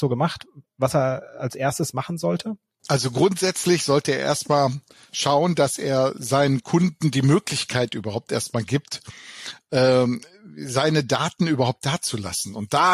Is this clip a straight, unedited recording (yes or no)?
yes